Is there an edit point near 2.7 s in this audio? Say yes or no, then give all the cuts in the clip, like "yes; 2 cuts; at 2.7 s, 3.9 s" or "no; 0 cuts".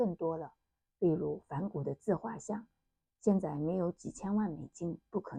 no; 0 cuts